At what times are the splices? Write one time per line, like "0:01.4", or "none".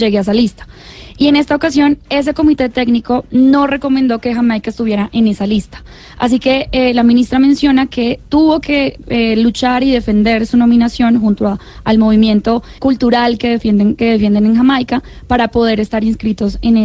0:12.8